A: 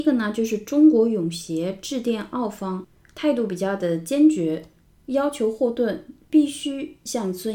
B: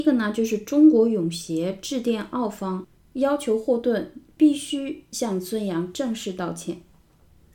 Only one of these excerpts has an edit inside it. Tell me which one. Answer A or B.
B